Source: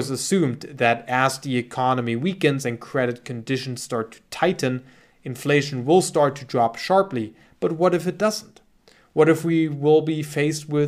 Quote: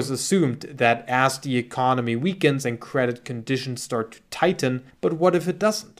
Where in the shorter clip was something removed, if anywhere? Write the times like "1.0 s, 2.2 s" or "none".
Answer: 4.9 s